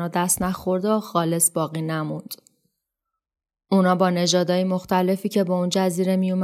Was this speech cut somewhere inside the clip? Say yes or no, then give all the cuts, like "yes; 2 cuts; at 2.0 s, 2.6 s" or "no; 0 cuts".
no; 0 cuts